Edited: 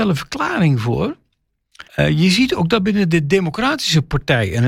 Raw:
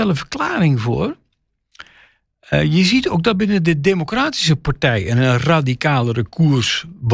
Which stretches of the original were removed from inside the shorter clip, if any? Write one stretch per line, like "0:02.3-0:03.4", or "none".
0:01.9-0:02.4